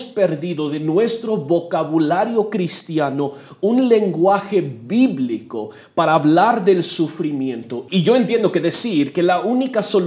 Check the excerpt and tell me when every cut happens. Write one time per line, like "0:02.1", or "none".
0:07.9